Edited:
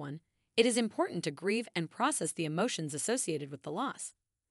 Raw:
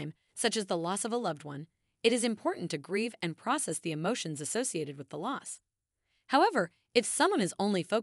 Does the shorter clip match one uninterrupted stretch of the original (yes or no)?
yes